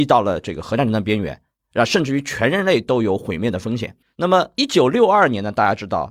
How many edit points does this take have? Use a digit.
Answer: 1